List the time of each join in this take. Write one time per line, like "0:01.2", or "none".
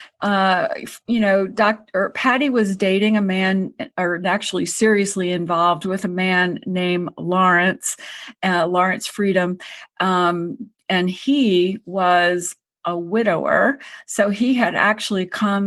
none

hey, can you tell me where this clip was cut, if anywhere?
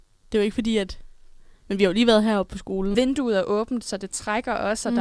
0:01.5
0:02.9

